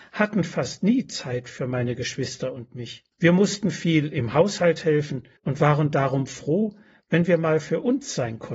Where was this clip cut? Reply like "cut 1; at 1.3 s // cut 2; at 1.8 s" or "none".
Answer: cut 1; at 3.1 s // cut 2; at 5.4 s